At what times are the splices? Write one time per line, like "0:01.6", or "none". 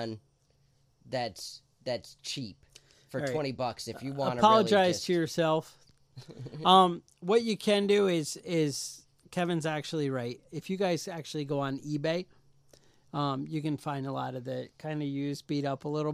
none